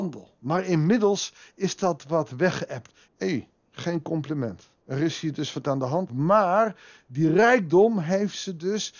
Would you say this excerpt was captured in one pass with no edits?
no; 3 cuts; at 3.1 s, 4.8 s, 6.1 s

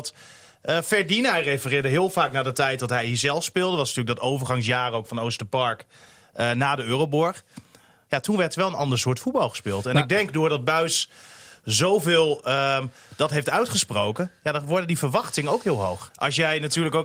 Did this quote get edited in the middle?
yes; 1 cut; at 16.1 s

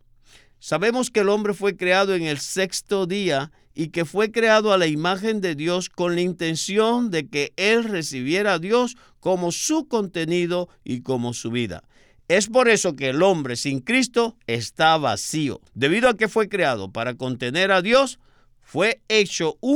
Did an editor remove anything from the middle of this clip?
yes; 1 cut; at 15.7 s

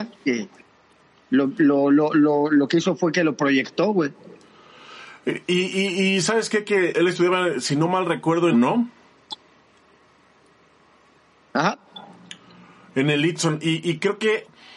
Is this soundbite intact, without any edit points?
no; 2 cuts; at 6.9 s, 8.5 s

